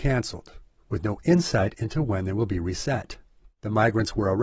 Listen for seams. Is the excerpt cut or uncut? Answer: uncut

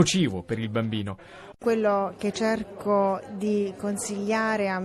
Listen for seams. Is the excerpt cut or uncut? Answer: cut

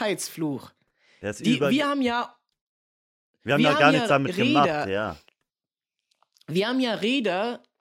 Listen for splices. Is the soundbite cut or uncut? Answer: uncut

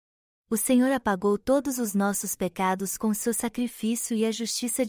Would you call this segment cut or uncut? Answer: uncut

